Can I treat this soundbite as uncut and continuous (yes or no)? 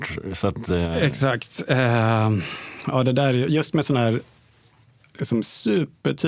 yes